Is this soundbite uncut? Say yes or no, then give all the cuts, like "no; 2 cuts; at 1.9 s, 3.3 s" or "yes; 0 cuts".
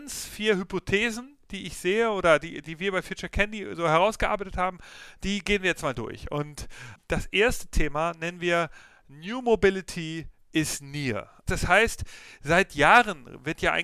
yes; 0 cuts